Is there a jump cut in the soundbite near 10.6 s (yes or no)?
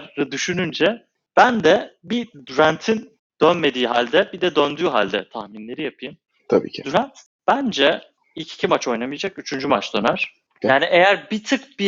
yes